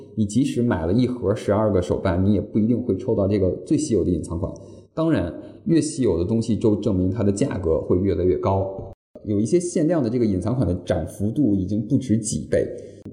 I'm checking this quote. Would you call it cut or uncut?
uncut